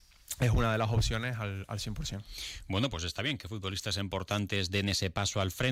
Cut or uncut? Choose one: uncut